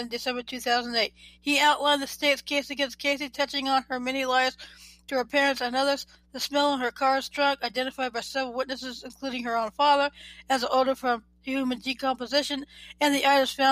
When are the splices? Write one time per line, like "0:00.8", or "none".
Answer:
0:01.4